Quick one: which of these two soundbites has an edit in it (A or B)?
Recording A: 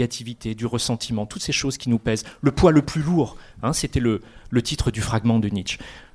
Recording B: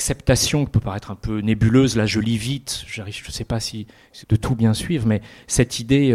B